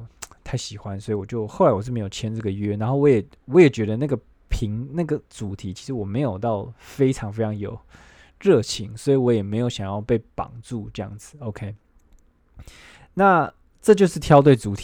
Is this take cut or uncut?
uncut